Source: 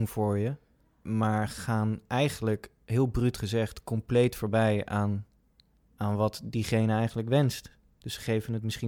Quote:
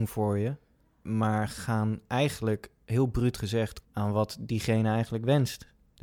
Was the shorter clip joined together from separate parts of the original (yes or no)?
yes